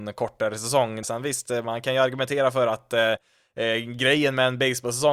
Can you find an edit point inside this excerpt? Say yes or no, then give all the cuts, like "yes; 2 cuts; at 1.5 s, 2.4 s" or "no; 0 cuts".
yes; 1 cut; at 1.0 s